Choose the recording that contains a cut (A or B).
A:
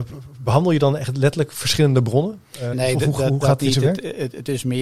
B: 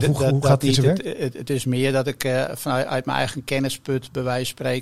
A